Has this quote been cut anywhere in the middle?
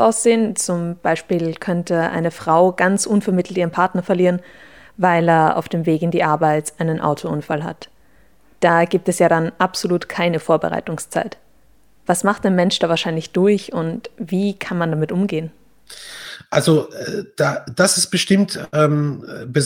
no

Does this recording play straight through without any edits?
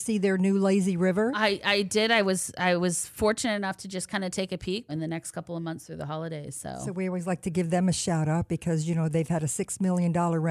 no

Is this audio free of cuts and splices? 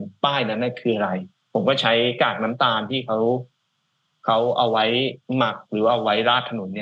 no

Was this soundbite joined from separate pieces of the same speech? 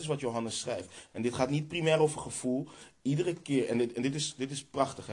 no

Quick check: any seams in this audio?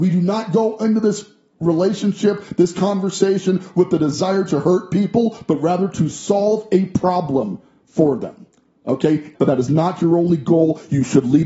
yes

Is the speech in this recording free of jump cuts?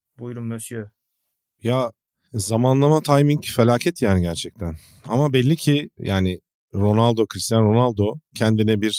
yes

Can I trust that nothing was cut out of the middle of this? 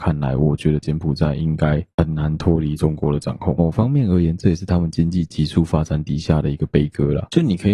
yes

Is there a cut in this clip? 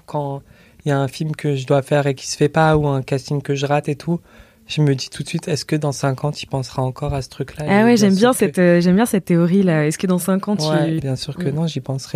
yes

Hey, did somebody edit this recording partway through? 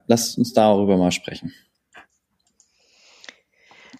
no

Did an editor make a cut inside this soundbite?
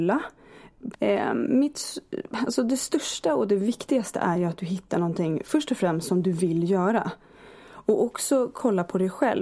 yes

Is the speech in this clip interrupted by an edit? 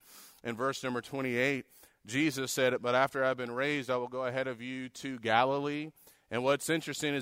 no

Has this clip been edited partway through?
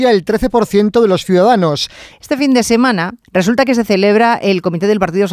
yes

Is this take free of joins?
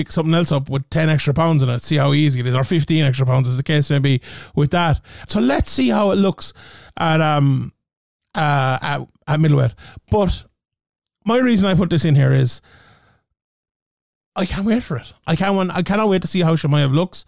no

